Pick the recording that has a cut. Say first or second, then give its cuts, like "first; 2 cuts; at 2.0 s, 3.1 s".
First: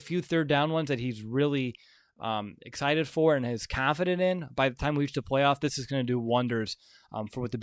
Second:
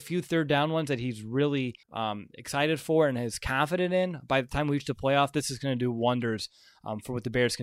second; 1 cut; at 1.8 s